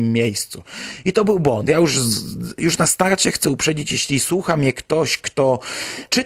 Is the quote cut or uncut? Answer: uncut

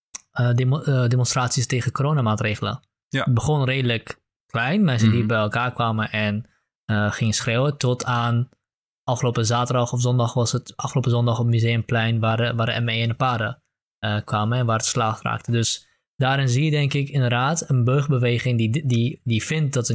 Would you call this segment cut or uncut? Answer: uncut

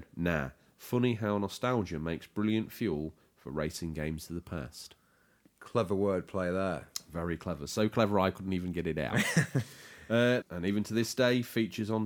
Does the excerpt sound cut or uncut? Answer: cut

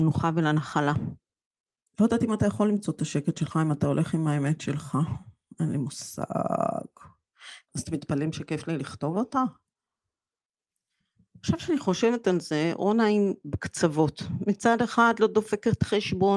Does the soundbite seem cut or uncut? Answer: cut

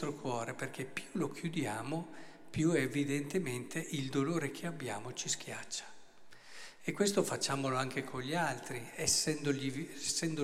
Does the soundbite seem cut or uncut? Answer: uncut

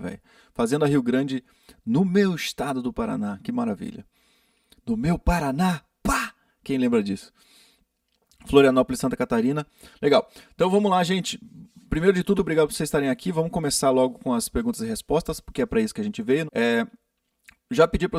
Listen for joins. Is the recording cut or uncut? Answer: cut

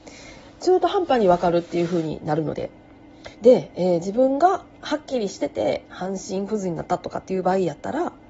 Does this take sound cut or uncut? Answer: cut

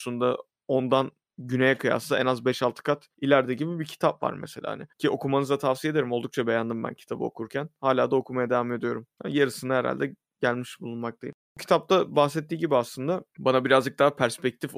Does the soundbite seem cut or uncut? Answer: cut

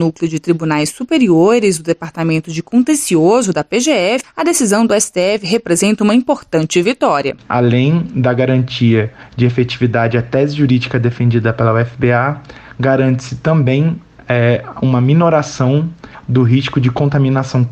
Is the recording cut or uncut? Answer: cut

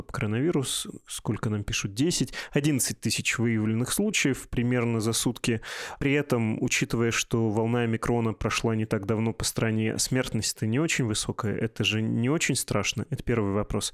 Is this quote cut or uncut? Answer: uncut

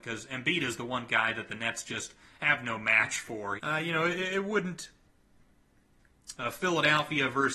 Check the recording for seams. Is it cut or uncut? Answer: cut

